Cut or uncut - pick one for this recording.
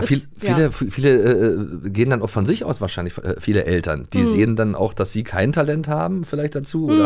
uncut